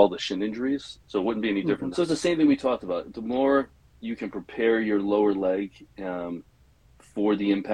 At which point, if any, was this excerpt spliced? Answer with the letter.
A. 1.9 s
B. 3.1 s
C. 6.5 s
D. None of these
A